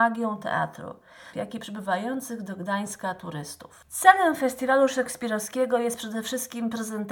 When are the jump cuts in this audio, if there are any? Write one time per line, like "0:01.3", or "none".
0:01.3